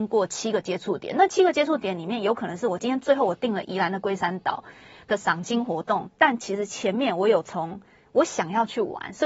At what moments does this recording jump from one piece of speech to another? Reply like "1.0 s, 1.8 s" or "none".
none